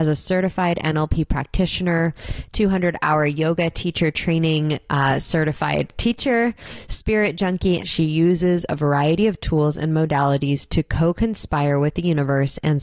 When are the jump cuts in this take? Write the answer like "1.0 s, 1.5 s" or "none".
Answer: 7.8 s